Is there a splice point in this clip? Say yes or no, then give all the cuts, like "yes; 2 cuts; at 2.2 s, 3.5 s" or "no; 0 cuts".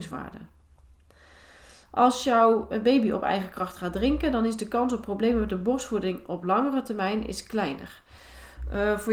no; 0 cuts